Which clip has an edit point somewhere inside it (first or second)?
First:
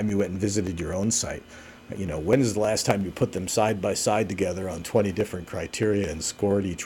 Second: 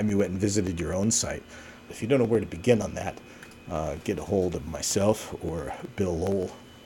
second